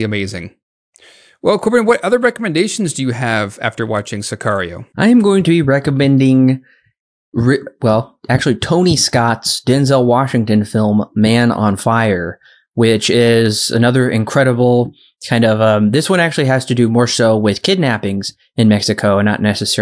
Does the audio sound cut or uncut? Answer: uncut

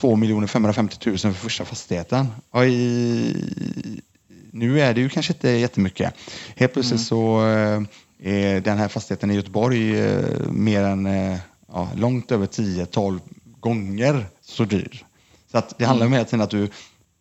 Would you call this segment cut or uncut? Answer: uncut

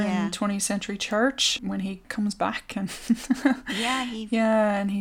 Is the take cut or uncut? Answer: uncut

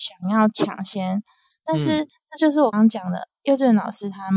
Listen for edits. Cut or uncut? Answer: cut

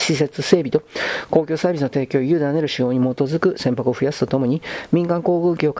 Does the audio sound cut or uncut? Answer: uncut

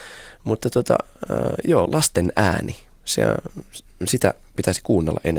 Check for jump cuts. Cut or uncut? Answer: cut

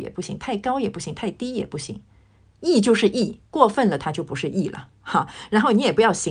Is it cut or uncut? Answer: cut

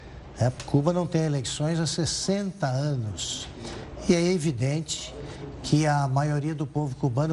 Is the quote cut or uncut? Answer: uncut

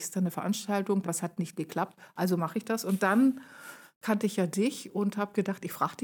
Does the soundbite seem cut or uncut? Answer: cut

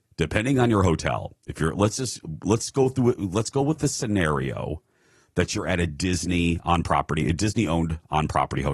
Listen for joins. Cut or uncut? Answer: uncut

